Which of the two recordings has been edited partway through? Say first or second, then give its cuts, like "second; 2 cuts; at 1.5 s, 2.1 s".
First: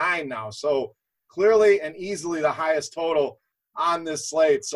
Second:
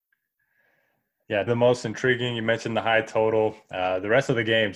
second; 1 cut; at 1.5 s